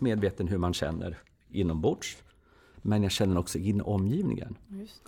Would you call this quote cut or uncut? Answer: cut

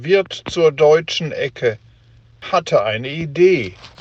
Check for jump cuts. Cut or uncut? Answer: uncut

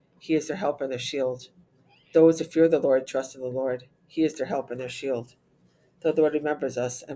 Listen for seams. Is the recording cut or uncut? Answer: uncut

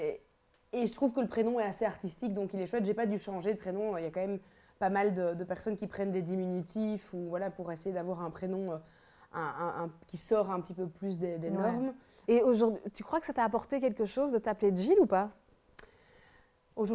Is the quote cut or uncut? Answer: cut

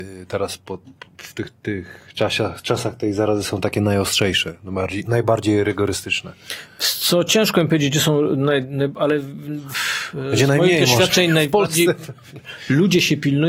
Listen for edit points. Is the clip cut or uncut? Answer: uncut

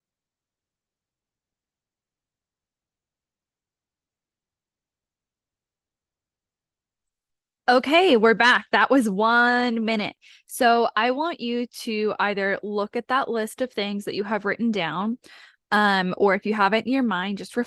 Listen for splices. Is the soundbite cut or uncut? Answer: uncut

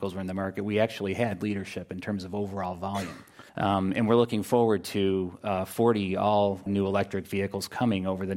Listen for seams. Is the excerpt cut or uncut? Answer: cut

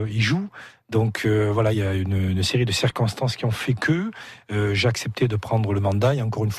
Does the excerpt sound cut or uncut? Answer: uncut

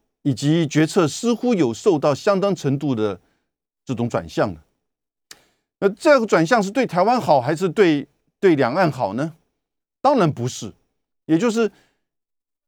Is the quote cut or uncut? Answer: uncut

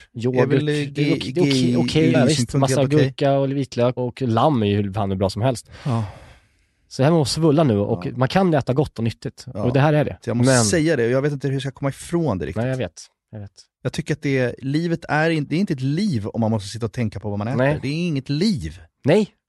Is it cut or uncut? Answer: cut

